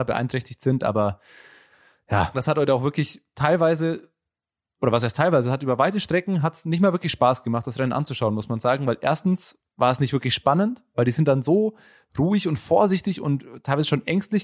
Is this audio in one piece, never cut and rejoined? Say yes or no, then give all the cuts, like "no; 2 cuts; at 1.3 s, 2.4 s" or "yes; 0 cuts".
no; 1 cut; at 2.3 s